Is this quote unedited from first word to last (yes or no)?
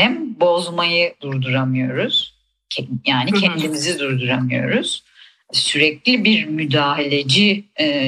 yes